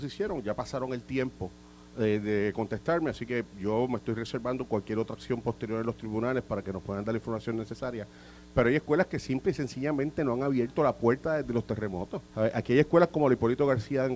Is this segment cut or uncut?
cut